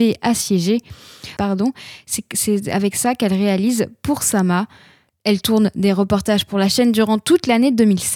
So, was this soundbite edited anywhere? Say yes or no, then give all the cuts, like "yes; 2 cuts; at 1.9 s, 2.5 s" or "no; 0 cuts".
yes; 2 cuts; at 1.4 s, 5.1 s